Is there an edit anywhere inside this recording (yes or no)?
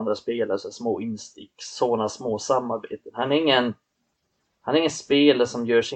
no